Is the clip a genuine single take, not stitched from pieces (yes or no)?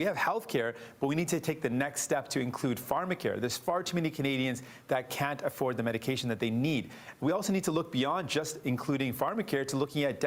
yes